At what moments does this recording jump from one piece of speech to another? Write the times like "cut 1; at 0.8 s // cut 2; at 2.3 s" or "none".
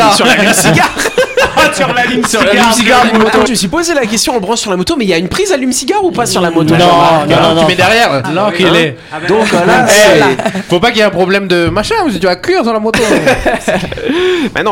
cut 1; at 3.5 s // cut 2; at 8.2 s